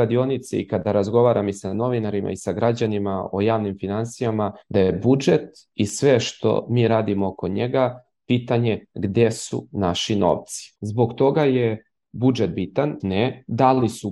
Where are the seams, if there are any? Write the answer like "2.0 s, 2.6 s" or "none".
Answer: 4.6 s, 10.7 s, 13.0 s